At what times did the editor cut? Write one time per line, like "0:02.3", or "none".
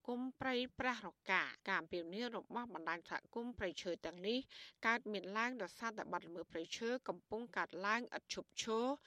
0:01.6